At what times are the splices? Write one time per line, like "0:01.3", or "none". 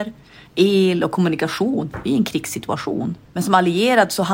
0:03.2